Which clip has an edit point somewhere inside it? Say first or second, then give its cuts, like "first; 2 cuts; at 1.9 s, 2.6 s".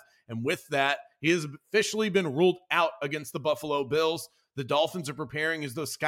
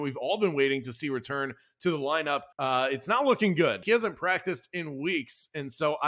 second; 2 cuts; at 2.5 s, 3.8 s